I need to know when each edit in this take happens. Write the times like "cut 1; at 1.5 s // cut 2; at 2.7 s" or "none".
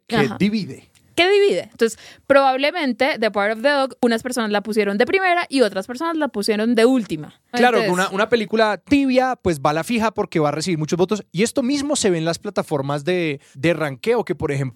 cut 1; at 7.5 s

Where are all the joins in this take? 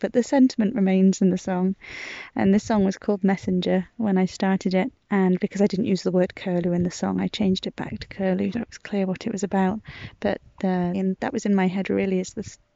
cut 1; at 8.5 s // cut 2; at 10.9 s

